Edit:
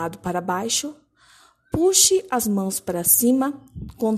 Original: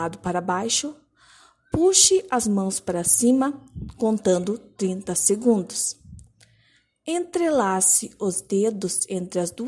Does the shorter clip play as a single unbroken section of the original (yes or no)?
yes